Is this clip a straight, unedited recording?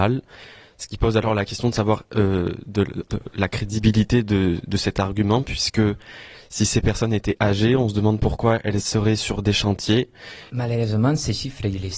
no; 1 cut; at 10.5 s

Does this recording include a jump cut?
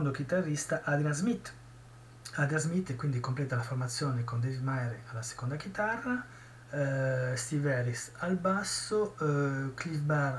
no; 0 cuts

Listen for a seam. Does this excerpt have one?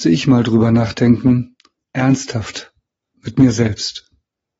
yes; 1 cut; at 1.8 s

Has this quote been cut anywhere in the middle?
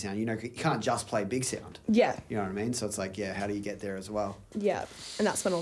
no; 0 cuts

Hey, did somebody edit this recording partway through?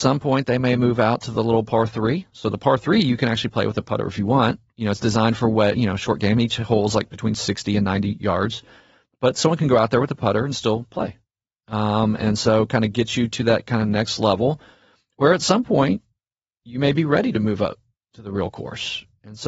no; 0 cuts

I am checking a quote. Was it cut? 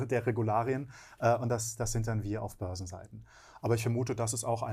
no; 0 cuts

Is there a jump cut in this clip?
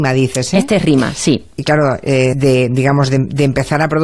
yes; 1 cut; at 2.3 s

